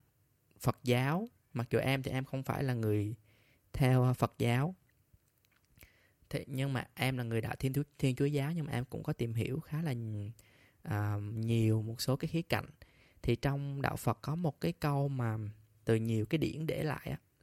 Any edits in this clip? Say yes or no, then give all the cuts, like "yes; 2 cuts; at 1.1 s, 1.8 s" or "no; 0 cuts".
yes; 1 cut; at 15.8 s